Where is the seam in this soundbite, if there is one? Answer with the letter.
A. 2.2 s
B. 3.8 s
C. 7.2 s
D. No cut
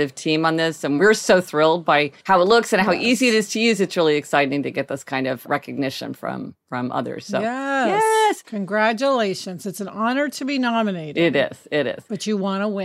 A